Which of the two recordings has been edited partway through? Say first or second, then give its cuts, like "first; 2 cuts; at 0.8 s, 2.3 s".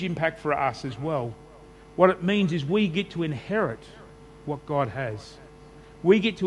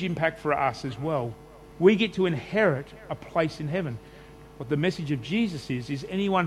second; 2 cuts; at 1.7 s, 4.5 s